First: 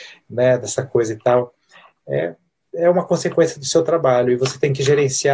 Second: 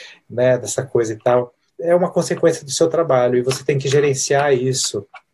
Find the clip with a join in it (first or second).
second